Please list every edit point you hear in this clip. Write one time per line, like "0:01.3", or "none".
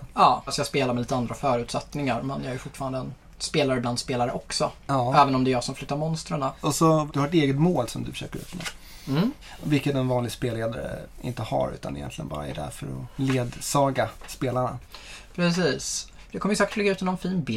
none